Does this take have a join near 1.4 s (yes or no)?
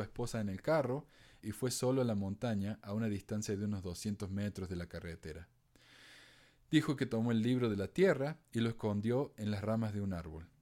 yes